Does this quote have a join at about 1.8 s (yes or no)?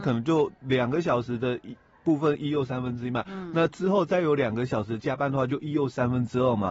no